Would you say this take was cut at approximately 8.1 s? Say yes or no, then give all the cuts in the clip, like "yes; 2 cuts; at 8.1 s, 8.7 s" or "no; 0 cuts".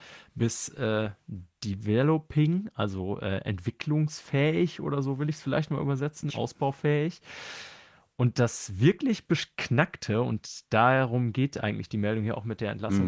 no; 1 cut; at 6.3 s